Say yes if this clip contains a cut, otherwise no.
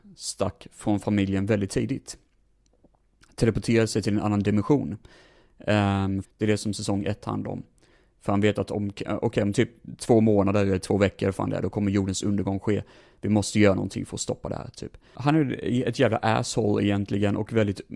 yes